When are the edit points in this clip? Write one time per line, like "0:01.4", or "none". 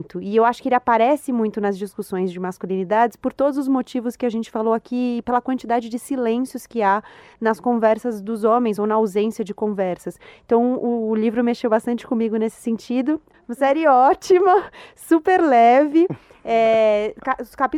0:05.2
0:13.3